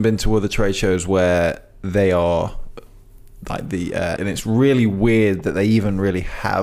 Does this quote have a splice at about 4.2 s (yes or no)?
yes